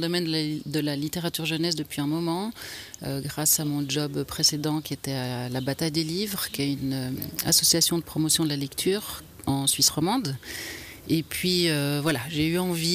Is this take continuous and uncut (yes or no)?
yes